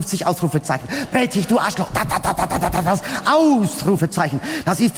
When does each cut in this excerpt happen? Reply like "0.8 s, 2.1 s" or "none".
none